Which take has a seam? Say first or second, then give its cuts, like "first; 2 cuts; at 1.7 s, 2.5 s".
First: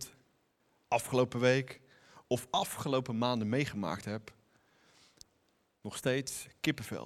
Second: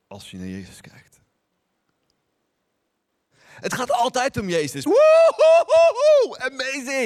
second; 2 cuts; at 3.3 s, 4.9 s